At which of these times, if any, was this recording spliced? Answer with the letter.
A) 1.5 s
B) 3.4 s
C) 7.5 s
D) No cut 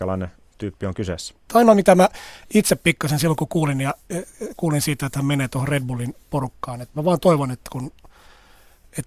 A